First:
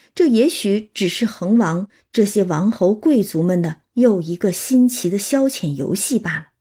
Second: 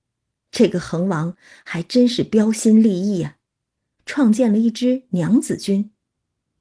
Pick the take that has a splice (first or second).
second